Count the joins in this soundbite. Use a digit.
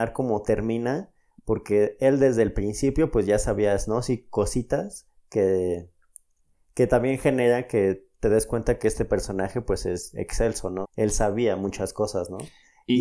1